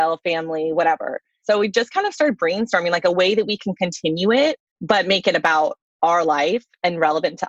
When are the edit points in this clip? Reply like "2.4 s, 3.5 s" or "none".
1.4 s, 4.7 s